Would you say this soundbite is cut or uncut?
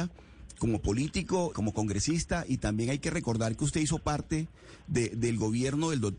cut